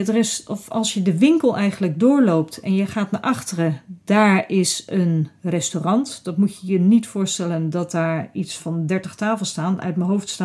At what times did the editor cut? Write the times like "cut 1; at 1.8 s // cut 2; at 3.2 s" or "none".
cut 1; at 8.6 s